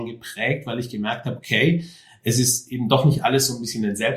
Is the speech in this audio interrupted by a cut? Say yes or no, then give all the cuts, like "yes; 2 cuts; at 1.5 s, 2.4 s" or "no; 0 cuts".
no; 0 cuts